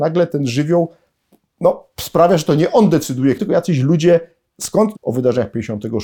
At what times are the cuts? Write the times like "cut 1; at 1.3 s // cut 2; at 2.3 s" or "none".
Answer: cut 1; at 1.9 s // cut 2; at 3.4 s // cut 3; at 4.9 s